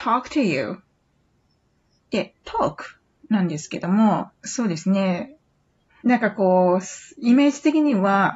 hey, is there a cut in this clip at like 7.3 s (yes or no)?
no